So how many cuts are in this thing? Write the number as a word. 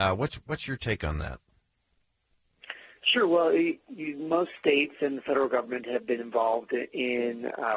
zero